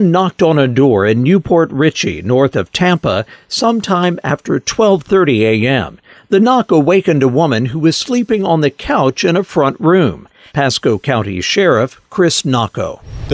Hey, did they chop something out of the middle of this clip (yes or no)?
no